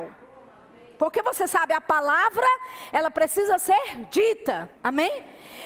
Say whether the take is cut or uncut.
cut